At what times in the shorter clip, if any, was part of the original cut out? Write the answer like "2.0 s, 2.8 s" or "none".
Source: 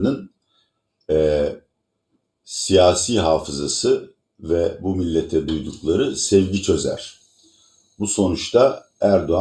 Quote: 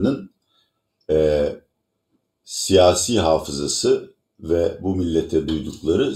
none